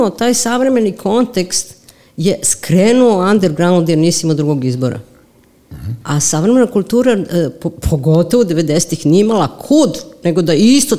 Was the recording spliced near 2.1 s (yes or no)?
no